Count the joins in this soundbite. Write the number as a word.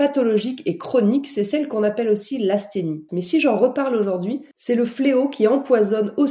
two